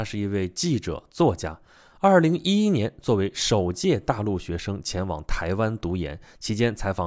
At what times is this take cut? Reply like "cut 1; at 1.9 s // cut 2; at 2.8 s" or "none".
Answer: none